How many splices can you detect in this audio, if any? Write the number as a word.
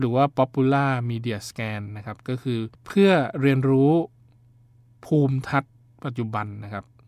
one